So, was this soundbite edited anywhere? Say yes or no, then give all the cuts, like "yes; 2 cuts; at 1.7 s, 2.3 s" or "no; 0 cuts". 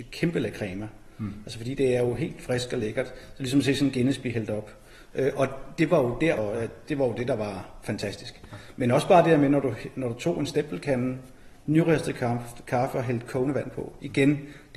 yes; 1 cut; at 6.4 s